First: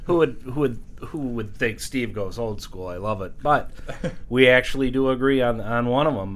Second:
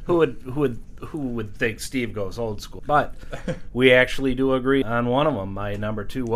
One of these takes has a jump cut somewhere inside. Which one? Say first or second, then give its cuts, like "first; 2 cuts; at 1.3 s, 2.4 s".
second; 2 cuts; at 2.8 s, 4.8 s